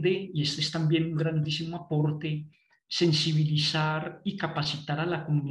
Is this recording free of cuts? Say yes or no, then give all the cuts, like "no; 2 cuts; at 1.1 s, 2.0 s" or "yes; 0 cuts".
yes; 0 cuts